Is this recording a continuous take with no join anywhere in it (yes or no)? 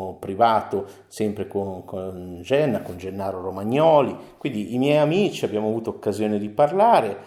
yes